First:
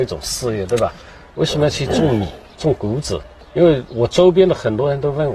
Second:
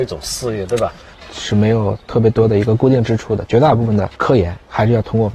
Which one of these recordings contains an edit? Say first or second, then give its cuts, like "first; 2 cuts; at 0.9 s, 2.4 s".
second; 1 cut; at 1.1 s